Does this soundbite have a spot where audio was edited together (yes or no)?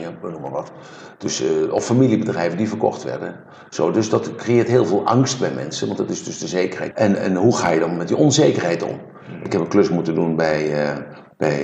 yes